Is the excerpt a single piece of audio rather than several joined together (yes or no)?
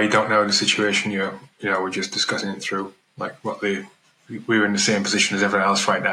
yes